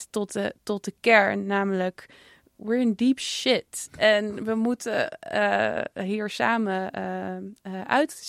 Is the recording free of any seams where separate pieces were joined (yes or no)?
yes